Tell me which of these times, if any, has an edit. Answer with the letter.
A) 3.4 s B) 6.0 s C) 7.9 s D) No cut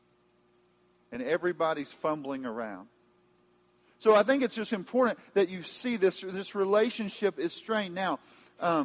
D